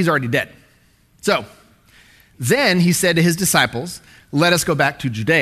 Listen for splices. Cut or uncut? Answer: uncut